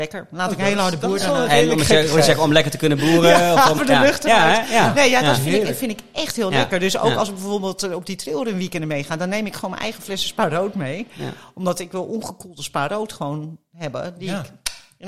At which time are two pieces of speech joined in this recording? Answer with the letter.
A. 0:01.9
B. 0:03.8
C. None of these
B